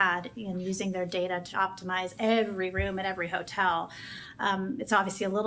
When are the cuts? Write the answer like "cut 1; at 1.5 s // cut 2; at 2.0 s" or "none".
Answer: cut 1; at 1.5 s